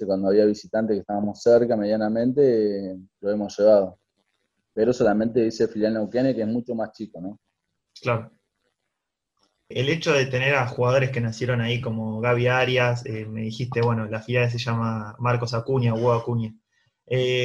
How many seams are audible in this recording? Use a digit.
0